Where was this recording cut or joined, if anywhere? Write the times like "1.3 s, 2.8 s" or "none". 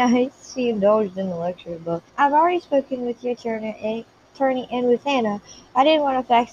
2.1 s